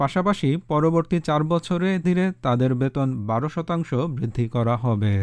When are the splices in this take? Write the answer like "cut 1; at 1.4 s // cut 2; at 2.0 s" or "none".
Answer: cut 1; at 2.0 s